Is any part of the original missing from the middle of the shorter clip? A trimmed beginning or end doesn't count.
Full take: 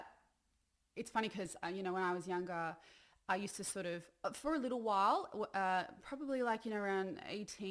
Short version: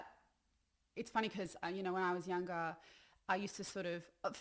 no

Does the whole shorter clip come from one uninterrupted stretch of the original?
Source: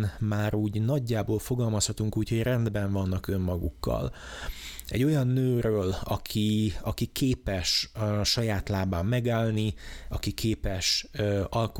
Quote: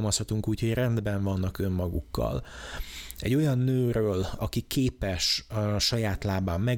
no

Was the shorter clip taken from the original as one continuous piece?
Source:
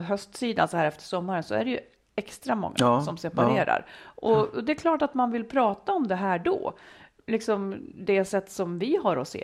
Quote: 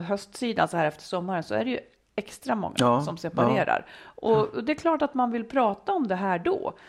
yes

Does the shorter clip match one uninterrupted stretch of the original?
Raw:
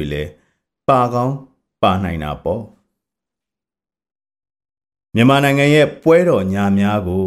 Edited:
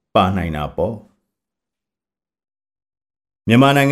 yes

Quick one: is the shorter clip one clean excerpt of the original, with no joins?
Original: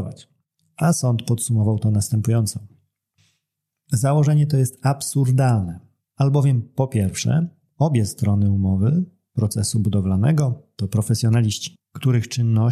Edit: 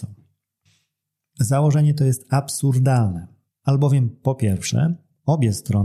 yes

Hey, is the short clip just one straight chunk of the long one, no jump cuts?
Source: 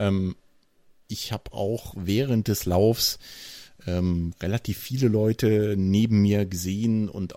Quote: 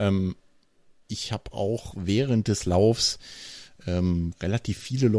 yes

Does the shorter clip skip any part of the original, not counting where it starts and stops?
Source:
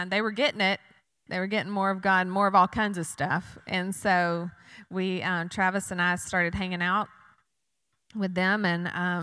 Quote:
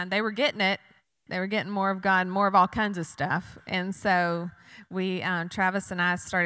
no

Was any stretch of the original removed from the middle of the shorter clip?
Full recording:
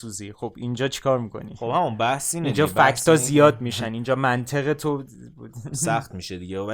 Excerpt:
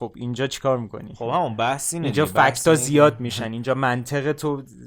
no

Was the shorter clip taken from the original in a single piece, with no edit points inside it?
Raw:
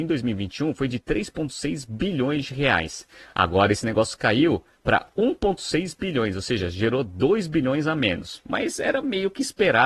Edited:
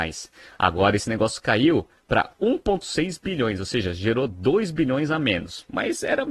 yes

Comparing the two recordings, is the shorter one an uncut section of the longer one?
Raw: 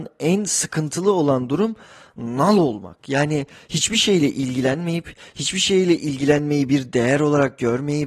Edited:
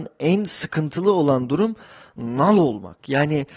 yes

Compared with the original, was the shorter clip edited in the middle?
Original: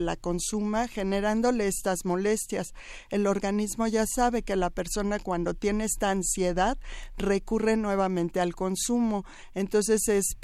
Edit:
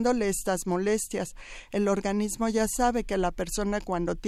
no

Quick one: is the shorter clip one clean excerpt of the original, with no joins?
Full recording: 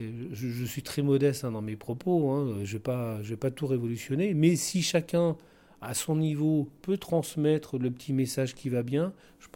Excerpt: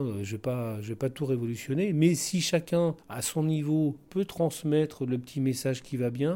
no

